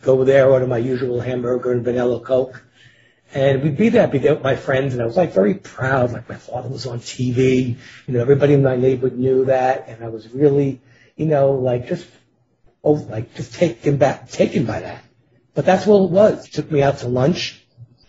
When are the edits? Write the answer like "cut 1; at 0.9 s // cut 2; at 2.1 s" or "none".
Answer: cut 1; at 13.1 s // cut 2; at 16.4 s